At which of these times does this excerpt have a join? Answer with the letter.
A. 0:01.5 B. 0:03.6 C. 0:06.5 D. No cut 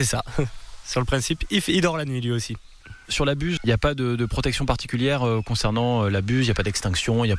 B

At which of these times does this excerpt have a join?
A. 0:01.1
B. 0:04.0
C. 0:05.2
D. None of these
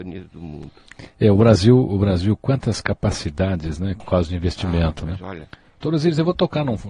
B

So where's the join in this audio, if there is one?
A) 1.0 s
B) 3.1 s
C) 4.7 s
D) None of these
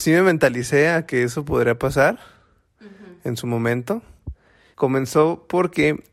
C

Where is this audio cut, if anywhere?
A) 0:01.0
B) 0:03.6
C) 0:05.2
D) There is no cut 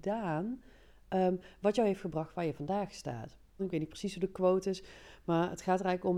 B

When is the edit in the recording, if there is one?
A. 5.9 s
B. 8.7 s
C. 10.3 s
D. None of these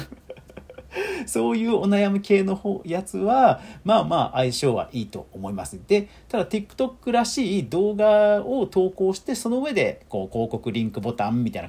D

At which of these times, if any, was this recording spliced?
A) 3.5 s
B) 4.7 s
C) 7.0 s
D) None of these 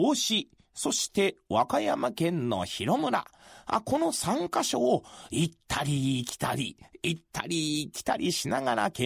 D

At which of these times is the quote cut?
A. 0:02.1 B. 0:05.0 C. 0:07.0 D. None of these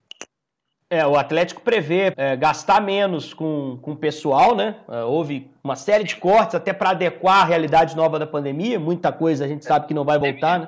A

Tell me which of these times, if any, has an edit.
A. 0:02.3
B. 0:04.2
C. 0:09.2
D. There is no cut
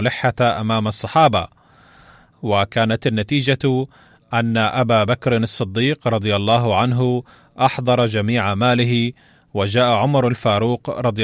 A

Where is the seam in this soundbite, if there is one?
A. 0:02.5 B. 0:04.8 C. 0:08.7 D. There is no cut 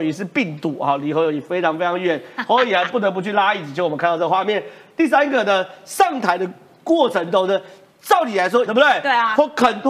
C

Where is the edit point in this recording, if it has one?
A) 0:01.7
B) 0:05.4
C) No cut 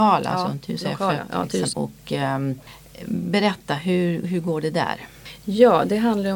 A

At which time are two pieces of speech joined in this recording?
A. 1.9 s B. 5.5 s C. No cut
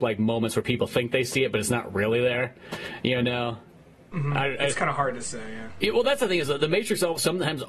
C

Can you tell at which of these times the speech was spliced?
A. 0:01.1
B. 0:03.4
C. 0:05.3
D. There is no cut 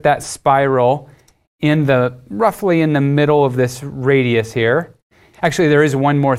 C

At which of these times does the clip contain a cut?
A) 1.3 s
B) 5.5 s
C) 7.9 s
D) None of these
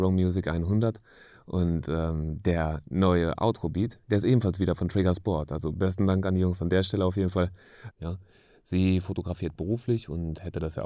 C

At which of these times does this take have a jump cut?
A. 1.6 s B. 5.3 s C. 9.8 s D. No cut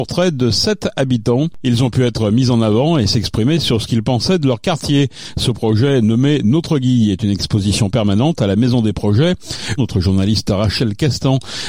C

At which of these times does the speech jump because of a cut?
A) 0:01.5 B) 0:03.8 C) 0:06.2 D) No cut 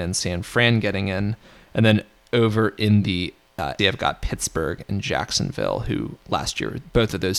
B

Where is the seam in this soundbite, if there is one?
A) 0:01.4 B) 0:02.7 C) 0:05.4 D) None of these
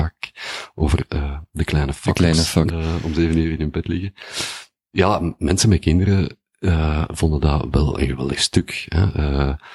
B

